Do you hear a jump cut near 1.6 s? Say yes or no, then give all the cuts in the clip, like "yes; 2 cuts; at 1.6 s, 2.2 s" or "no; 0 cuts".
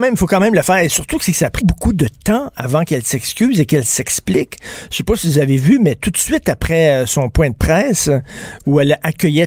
yes; 1 cut; at 1.6 s